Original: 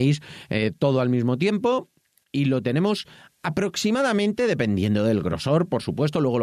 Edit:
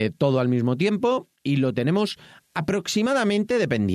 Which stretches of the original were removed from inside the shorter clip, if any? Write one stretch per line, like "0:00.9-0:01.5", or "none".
0:02.0-0:02.2